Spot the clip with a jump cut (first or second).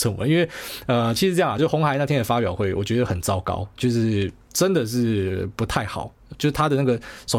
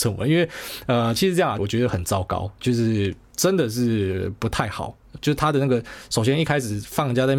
second